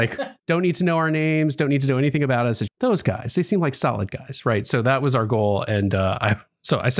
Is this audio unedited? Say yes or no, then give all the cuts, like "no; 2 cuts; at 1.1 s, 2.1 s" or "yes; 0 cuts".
no; 1 cut; at 2.7 s